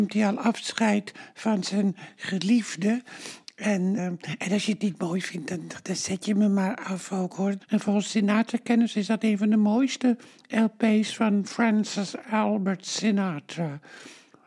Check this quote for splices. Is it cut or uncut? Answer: cut